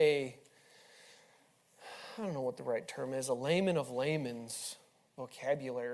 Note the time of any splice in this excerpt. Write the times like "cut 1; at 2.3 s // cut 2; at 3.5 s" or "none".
none